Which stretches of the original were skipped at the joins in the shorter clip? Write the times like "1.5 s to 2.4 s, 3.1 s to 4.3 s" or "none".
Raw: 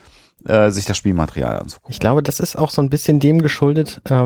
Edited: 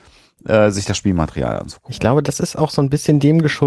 none